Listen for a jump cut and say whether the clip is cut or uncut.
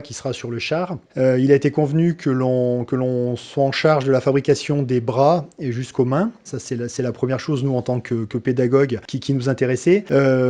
cut